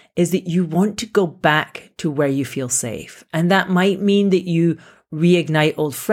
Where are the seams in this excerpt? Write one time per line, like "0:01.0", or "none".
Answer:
none